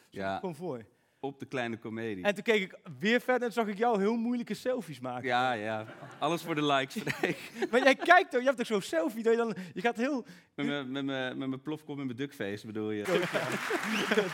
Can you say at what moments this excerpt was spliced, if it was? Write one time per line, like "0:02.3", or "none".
0:13.0